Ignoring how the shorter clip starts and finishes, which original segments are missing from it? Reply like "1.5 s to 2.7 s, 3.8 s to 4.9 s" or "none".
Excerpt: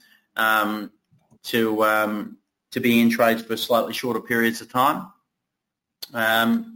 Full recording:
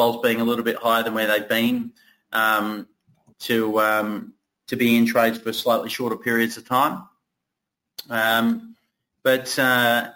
none